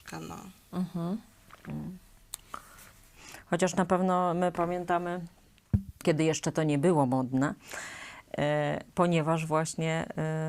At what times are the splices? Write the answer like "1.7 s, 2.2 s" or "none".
6.0 s